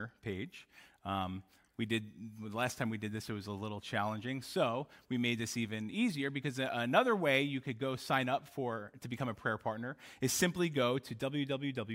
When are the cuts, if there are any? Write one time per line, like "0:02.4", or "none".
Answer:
none